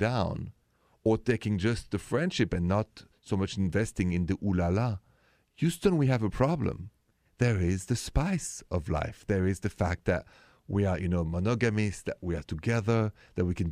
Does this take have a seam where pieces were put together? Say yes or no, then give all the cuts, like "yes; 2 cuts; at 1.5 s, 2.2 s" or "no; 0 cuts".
yes; 1 cut; at 7.3 s